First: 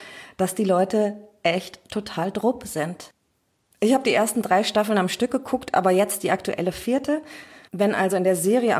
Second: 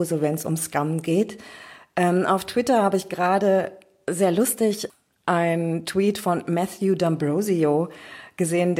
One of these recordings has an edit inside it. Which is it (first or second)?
first